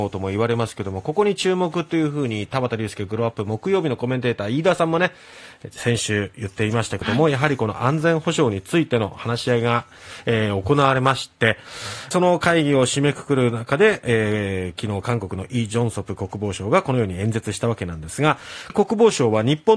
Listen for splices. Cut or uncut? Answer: cut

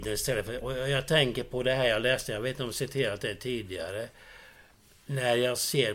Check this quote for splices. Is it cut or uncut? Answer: uncut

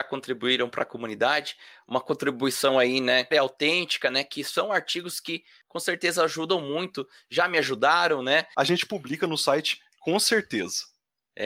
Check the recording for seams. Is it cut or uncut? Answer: cut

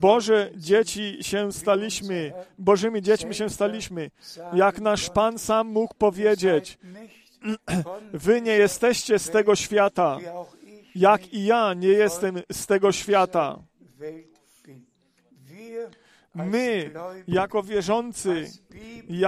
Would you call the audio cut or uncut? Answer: uncut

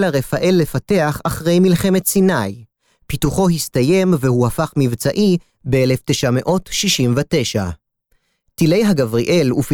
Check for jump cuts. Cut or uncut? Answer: uncut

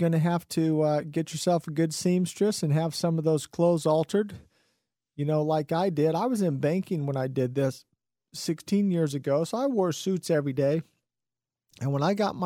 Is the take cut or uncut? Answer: uncut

